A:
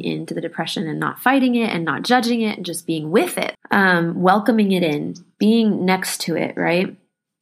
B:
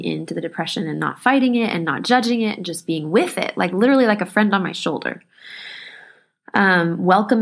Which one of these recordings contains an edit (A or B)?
A